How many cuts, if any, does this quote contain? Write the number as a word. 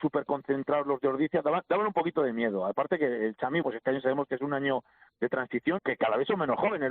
two